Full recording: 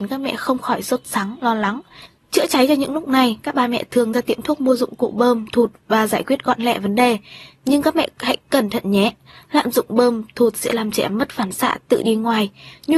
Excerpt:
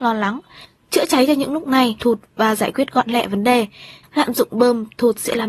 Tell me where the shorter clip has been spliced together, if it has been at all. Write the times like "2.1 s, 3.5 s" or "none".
2.0 s, 4.0 s

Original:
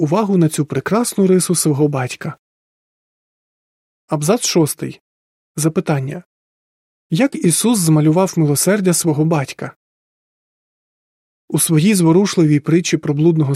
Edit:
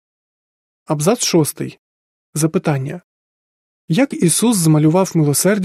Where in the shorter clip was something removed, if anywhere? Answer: none

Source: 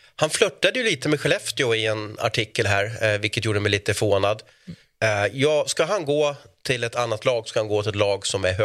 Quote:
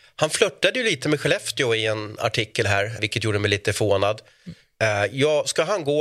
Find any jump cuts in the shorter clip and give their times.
3.0 s

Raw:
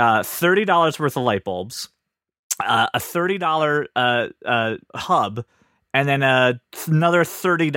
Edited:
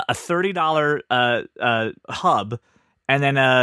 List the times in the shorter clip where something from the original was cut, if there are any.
none

